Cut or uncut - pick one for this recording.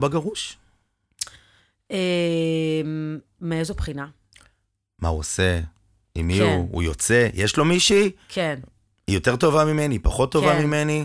uncut